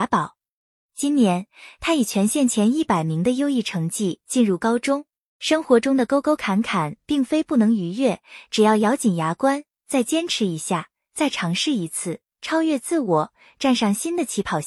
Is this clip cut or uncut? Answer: cut